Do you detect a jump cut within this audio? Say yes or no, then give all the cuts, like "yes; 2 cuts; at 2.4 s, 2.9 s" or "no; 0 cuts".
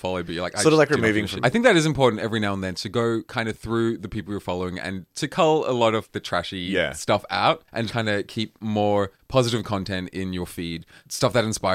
yes; 2 cuts; at 1.4 s, 7.9 s